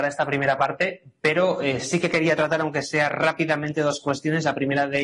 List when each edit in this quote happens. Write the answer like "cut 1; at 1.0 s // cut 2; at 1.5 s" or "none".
none

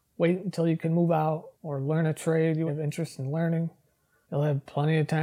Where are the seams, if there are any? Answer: cut 1; at 1.5 s // cut 2; at 2.7 s

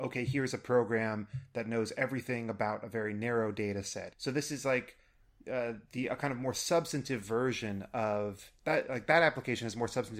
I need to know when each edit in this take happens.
cut 1; at 4.1 s

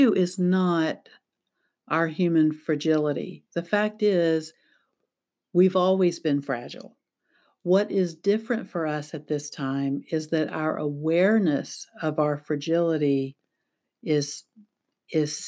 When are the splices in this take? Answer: none

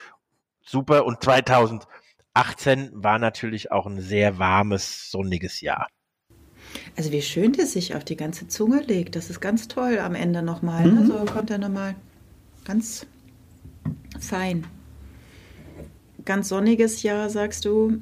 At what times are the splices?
none

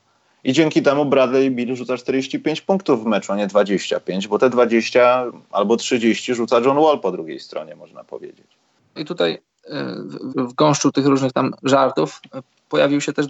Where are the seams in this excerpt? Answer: cut 1; at 9.0 s // cut 2; at 10.3 s

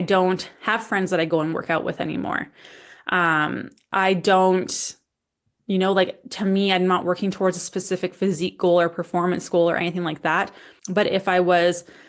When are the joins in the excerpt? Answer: cut 1; at 10.8 s

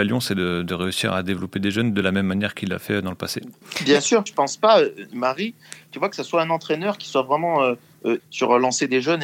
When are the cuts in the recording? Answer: cut 1; at 4.3 s // cut 2; at 8.2 s

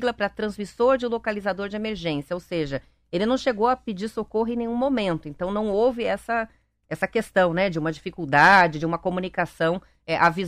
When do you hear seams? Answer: none

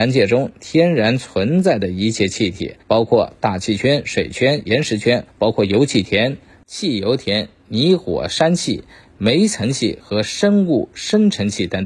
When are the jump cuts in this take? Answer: cut 1; at 2.8 s // cut 2; at 5.3 s

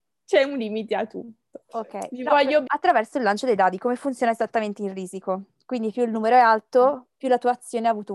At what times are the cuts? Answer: cut 1; at 2.7 s

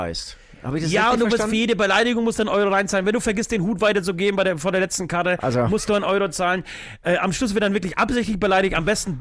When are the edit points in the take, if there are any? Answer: none

